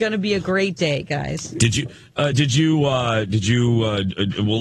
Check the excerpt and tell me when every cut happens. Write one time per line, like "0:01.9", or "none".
none